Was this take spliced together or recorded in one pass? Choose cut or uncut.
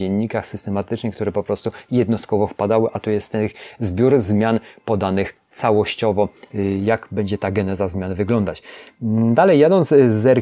uncut